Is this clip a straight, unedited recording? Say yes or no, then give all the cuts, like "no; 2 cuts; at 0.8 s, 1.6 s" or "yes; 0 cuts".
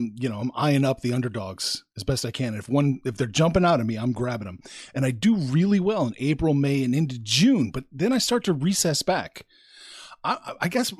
yes; 0 cuts